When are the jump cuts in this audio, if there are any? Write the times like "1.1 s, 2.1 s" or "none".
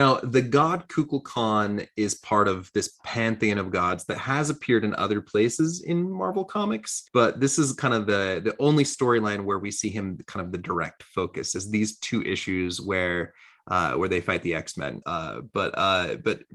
7.1 s, 15.0 s